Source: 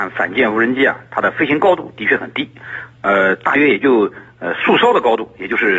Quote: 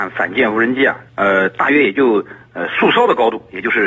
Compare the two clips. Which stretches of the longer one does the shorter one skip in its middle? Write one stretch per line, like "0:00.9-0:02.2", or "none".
0:01.1-0:02.9